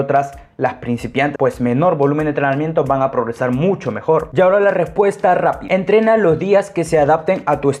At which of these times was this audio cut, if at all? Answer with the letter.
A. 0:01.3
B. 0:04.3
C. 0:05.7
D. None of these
A